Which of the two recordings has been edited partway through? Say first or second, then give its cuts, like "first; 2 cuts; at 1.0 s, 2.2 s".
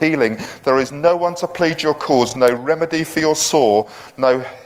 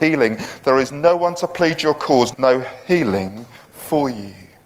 second; 1 cut; at 2.3 s